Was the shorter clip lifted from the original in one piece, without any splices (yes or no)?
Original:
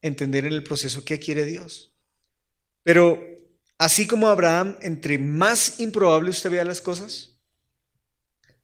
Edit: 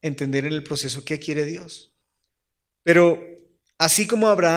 yes